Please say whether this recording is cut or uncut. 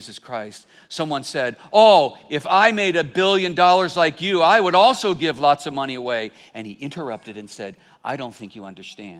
uncut